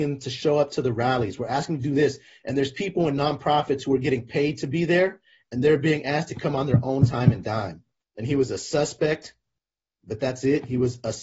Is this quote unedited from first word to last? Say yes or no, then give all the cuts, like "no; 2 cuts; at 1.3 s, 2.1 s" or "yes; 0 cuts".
no; 1 cut; at 8.0 s